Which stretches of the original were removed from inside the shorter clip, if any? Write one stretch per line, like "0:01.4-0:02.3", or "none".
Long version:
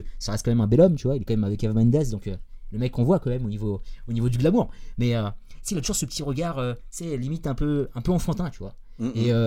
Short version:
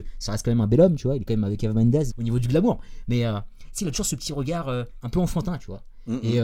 0:02.1-0:04.0
0:06.9-0:07.9